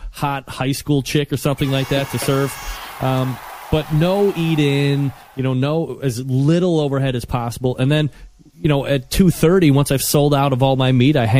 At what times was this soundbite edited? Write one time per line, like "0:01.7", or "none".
none